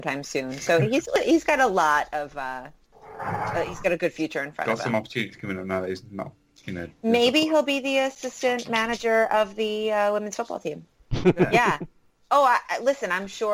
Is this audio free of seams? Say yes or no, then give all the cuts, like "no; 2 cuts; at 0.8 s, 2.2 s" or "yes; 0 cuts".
no; 1 cut; at 11.2 s